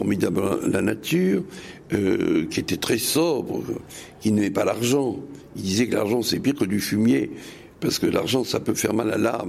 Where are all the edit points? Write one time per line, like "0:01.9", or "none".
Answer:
none

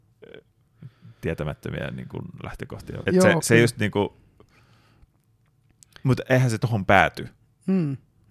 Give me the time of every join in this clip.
0:03.0

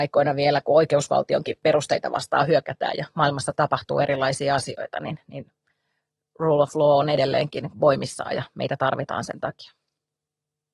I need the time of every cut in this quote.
none

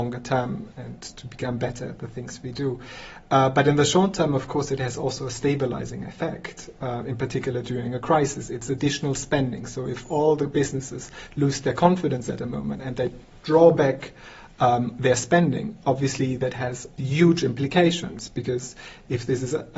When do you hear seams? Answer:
none

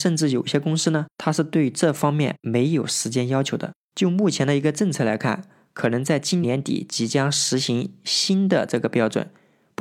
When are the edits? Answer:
0:03.8
0:06.4

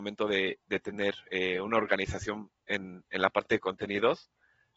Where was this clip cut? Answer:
none

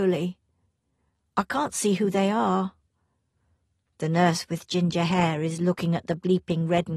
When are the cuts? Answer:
none

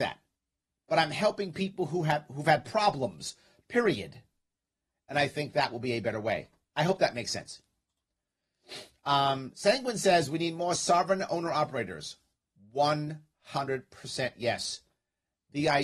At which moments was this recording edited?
none

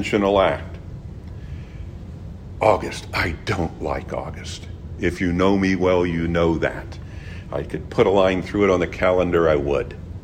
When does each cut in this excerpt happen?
none

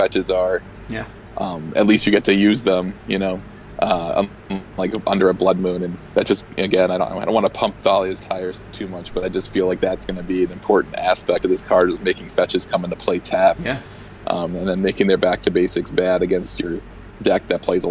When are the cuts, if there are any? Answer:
none

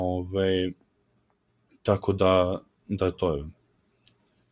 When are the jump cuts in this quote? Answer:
0:03.1

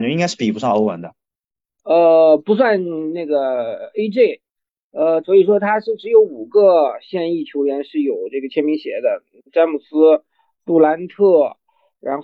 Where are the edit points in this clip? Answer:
0:01.8
0:05.2

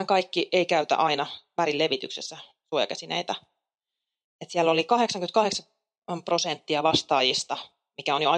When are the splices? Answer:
none

